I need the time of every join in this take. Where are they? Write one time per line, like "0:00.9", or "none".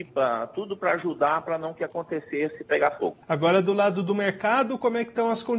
0:03.2